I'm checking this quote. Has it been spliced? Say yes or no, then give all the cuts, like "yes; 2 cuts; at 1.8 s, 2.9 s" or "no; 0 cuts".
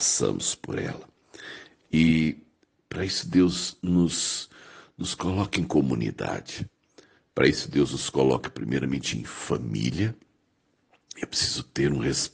no; 0 cuts